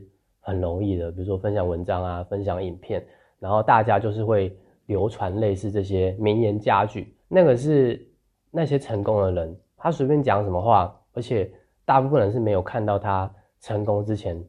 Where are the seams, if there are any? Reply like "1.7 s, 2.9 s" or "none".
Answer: 7.2 s, 9.8 s, 11.1 s